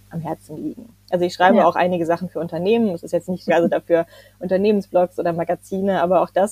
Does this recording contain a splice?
yes; 1 cut; at 3.5 s

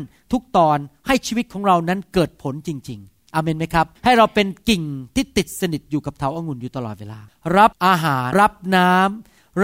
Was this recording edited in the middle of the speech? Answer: yes; 2 cuts; at 4.0 s, 8.3 s

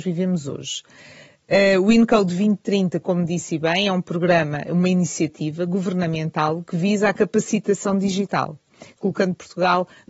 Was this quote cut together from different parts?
yes; 1 cut; at 9.0 s

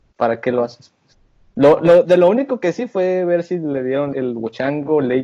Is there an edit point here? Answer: yes; 1 cut; at 4.1 s

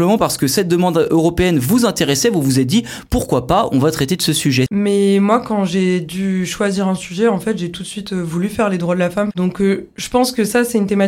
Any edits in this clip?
yes; 2 cuts; at 4.7 s, 9.3 s

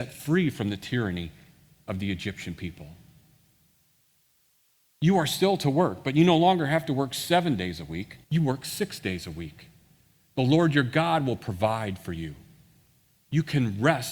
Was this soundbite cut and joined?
yes; 1 cut; at 8.2 s

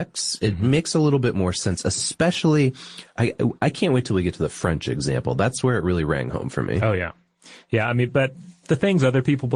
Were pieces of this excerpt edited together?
no; 0 cuts

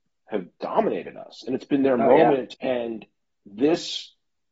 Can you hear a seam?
yes; 1 cut; at 2.5 s

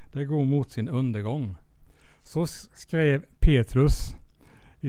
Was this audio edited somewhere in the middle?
no; 0 cuts

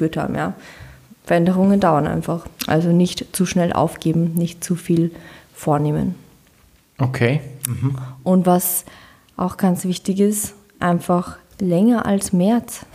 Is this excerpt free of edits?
yes; 0 cuts

